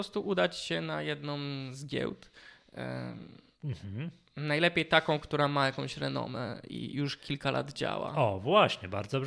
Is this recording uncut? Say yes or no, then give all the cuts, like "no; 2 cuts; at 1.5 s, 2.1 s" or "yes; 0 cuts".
yes; 0 cuts